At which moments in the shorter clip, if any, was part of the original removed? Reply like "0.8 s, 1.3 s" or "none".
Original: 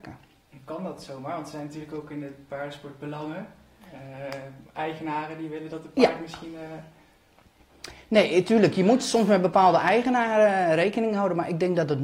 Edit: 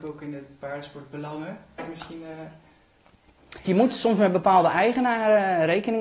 1.8 s, 3.6 s